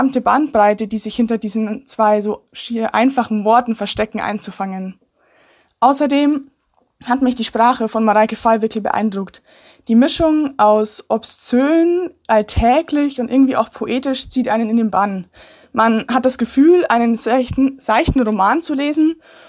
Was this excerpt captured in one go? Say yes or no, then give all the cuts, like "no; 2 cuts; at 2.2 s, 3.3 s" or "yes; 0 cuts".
yes; 0 cuts